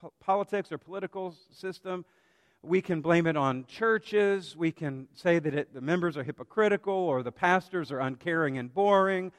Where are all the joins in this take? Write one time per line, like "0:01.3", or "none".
none